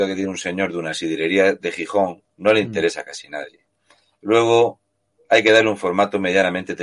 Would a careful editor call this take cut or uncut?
cut